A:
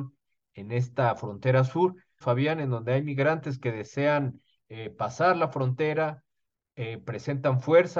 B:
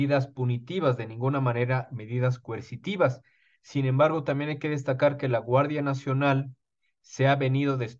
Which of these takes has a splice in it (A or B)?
A